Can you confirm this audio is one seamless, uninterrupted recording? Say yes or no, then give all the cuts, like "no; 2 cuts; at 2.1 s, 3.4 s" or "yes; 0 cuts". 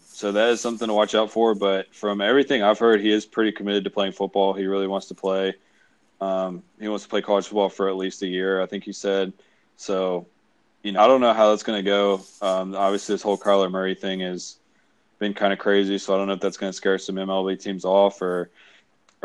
no; 1 cut; at 11.0 s